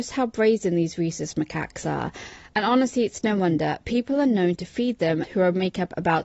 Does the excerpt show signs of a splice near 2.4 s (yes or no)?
no